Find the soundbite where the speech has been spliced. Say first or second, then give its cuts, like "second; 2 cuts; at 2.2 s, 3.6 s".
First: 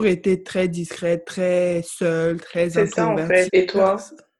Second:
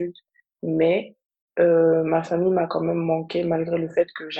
first; 1 cut; at 3.5 s